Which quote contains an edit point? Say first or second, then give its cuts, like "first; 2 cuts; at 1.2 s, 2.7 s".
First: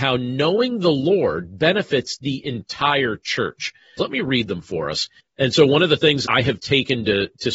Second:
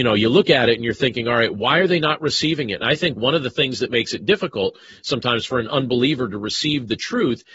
first; 3 cuts; at 4.0 s, 5.2 s, 6.2 s